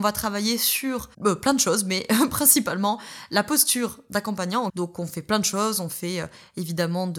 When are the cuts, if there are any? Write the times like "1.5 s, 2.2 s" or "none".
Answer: 1.1 s, 4.7 s